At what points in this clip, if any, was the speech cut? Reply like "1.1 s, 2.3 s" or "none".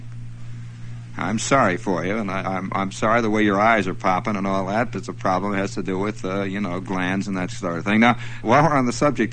4.9 s, 8.4 s